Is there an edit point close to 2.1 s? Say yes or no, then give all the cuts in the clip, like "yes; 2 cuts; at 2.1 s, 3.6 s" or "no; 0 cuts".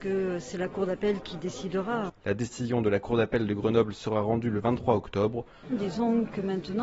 yes; 2 cuts; at 2.1 s, 5.6 s